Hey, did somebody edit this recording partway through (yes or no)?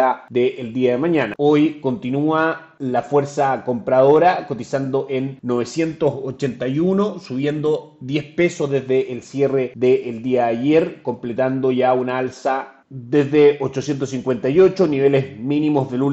yes